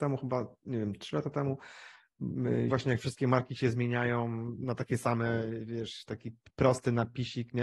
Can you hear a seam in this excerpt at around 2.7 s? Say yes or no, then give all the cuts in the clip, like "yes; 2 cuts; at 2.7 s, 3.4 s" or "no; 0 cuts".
yes; 1 cut; at 2.7 s